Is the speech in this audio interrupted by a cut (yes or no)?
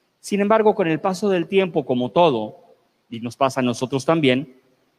no